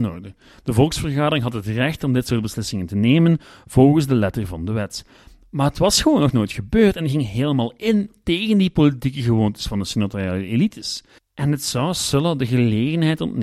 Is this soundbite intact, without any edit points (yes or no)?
no